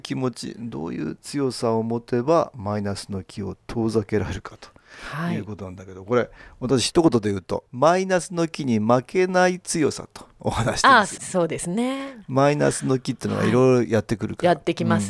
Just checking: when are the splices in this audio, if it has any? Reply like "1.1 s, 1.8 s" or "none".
none